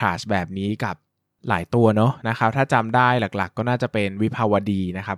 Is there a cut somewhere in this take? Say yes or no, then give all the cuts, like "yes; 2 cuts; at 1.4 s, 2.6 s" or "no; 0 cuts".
no; 0 cuts